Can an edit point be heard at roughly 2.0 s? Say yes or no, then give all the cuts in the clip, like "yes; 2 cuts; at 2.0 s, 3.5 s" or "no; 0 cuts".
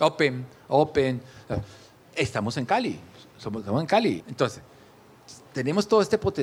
no; 1 cut; at 4.2 s